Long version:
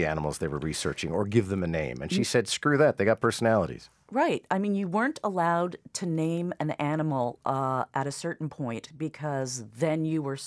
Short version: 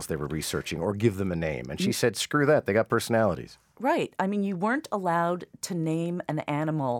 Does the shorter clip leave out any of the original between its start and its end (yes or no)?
no